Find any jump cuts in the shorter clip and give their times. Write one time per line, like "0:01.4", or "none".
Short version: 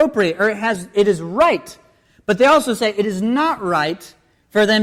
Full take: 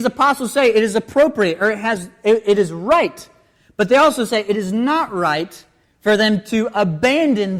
0:00.9